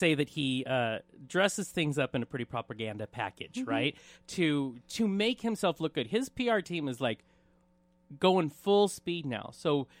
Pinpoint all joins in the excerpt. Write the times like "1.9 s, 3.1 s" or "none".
none